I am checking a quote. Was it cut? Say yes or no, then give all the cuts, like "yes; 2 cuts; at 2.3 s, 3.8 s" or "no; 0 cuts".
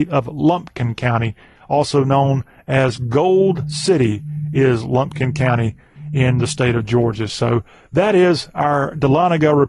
no; 0 cuts